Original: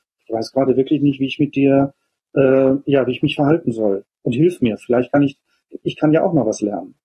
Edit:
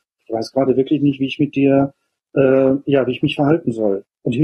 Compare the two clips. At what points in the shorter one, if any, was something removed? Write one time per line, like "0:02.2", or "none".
none